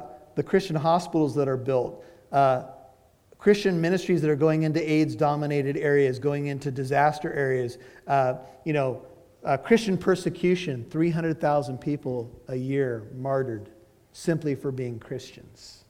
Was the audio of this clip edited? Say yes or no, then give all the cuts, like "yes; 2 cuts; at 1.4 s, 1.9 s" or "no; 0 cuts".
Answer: no; 0 cuts